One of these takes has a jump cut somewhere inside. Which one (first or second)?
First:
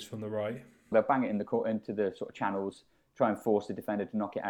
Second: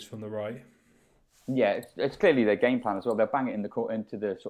first